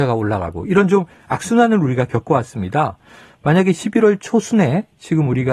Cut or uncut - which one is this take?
uncut